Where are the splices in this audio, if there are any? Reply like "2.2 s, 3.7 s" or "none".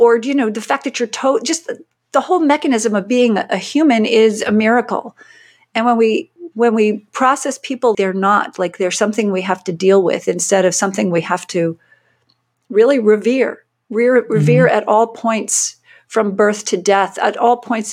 7.9 s